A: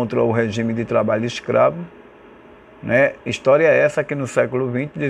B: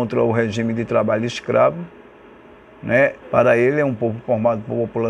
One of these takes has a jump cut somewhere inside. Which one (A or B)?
B